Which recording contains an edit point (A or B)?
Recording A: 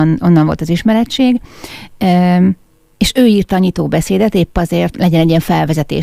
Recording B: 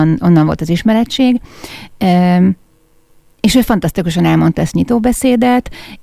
A